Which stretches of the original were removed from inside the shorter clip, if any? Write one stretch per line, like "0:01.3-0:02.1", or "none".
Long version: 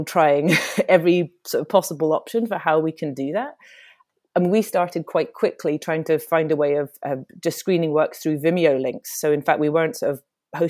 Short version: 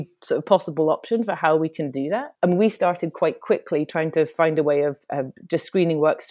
0:03.6-0:04.3